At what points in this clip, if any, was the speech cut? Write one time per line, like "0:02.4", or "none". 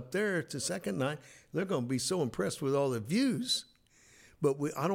none